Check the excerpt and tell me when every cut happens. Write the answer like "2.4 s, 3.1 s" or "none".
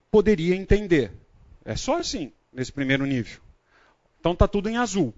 none